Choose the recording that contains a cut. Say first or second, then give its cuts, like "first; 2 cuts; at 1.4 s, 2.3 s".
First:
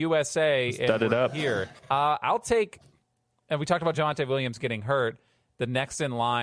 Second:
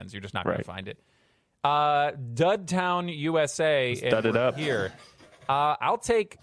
first; 1 cut; at 1.8 s